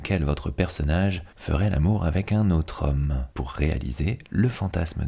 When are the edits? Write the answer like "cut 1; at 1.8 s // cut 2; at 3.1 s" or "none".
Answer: cut 1; at 1.3 s // cut 2; at 3.3 s